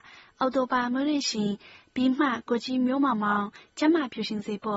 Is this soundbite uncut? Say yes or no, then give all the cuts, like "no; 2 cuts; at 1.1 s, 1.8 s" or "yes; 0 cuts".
yes; 0 cuts